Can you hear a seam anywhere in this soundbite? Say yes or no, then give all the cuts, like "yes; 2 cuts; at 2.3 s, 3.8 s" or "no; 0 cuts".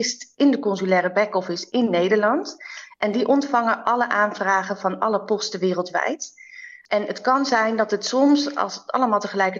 no; 0 cuts